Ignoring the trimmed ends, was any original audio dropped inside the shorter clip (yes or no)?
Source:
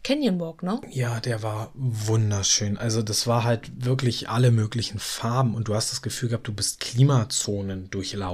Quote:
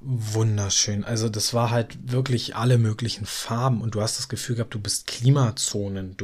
no